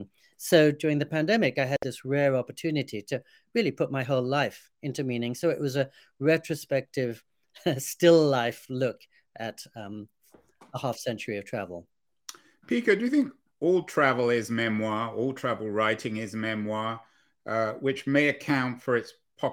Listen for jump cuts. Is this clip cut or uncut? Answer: uncut